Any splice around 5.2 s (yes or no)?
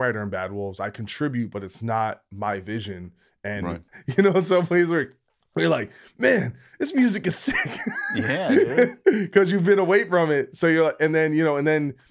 no